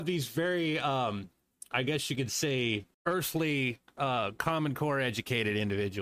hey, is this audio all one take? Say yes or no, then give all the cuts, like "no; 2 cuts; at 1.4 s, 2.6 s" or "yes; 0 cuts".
no; 1 cut; at 2.9 s